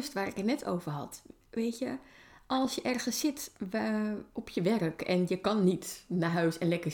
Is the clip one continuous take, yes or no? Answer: yes